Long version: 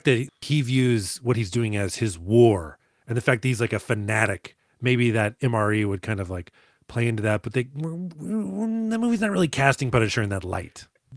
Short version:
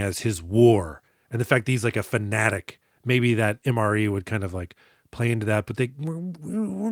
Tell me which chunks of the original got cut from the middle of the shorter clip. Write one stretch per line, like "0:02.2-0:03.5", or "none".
none